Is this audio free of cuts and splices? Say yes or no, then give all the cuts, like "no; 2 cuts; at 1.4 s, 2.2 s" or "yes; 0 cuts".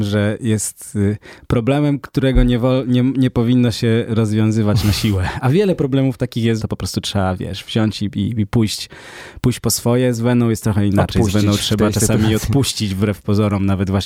no; 1 cut; at 6.6 s